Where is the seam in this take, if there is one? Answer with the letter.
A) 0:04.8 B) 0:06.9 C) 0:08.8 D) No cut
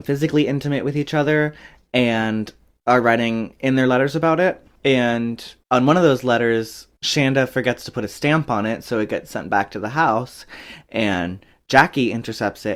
A